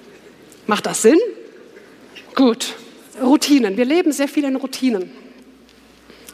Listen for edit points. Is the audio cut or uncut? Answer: cut